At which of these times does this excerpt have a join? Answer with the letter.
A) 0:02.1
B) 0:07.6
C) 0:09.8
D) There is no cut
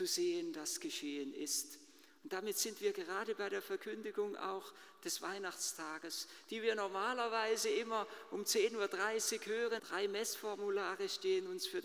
C